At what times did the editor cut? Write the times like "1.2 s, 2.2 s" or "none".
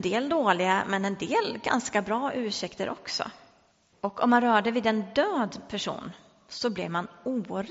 3.9 s